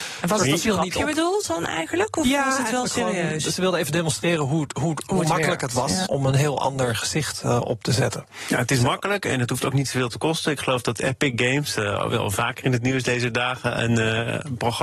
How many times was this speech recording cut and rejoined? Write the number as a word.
one